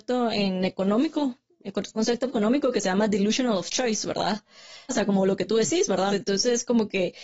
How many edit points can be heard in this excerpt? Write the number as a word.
two